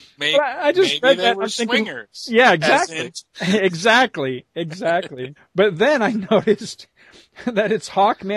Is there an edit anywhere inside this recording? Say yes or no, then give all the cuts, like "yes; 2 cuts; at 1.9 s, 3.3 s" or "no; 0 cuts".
yes; 2 cuts; at 3.2 s, 5.4 s